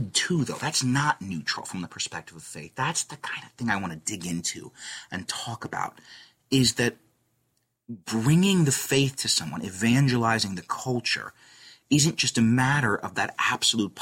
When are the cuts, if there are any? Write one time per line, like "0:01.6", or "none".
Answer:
none